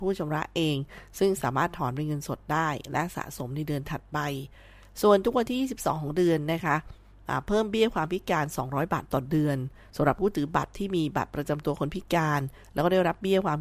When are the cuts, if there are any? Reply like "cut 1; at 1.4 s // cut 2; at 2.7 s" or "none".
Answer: none